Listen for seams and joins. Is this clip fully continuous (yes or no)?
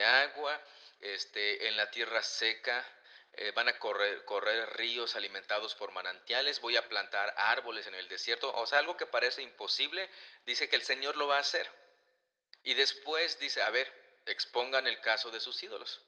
yes